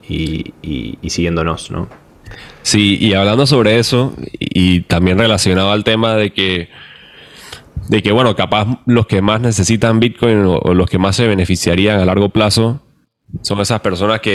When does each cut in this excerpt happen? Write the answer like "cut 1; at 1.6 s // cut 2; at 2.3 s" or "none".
none